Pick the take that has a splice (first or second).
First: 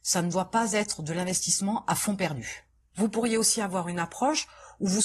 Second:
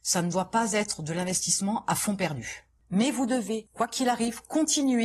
first